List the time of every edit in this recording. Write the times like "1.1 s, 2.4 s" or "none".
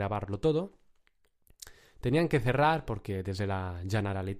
none